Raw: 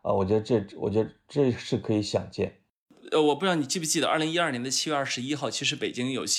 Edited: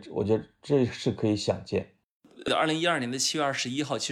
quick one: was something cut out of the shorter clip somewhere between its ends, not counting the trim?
yes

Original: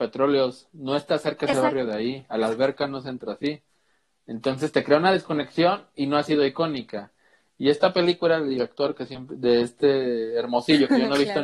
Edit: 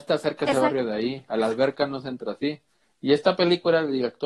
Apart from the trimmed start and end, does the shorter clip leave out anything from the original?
yes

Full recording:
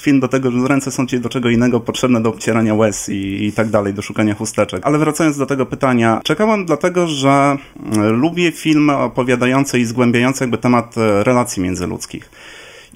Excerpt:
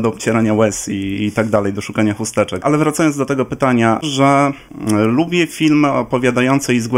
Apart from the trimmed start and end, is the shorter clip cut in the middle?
yes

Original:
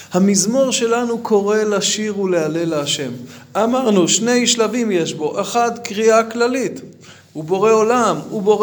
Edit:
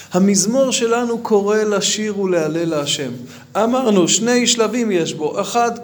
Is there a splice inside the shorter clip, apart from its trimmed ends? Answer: no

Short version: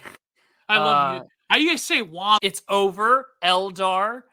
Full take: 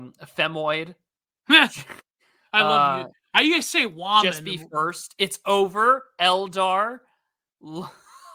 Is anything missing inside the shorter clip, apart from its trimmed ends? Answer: yes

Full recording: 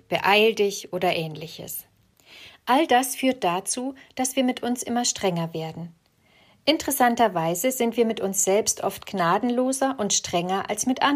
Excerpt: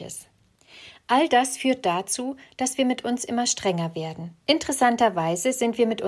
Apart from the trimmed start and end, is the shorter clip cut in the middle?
yes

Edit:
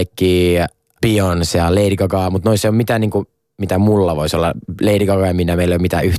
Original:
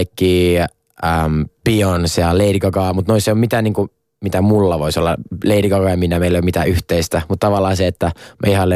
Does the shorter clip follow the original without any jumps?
no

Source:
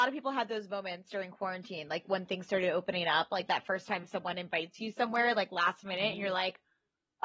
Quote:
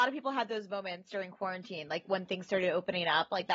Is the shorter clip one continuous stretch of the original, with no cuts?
yes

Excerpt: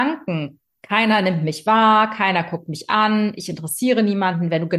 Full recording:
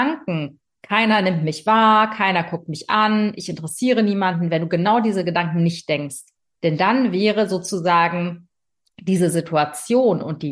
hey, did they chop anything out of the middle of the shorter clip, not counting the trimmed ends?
no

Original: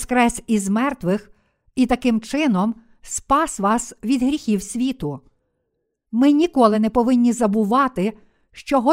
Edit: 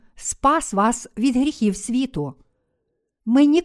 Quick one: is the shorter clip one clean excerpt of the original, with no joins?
yes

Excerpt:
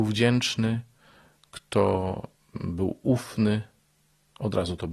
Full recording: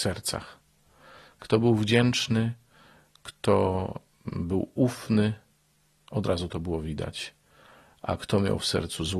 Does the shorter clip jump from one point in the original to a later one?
no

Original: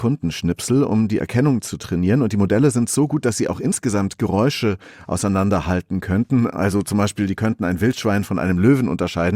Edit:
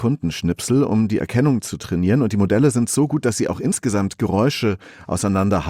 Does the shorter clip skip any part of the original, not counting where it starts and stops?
no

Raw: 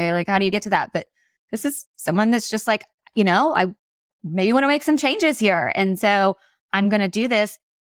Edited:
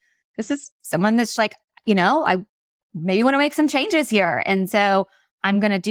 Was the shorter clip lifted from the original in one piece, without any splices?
no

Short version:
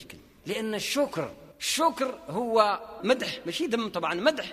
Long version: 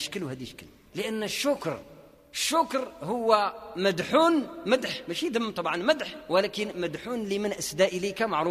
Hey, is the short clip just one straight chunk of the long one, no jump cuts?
no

